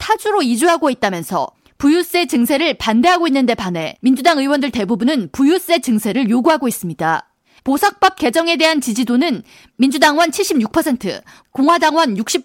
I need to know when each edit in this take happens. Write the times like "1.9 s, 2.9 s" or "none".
7.6 s